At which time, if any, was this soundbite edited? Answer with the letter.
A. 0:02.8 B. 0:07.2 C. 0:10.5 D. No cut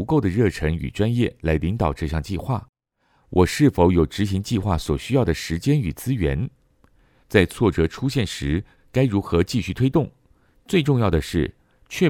B